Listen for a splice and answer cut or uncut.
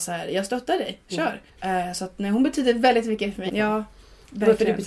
cut